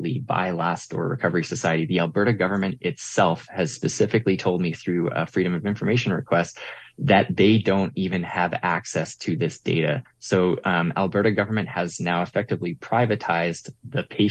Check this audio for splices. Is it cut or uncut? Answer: uncut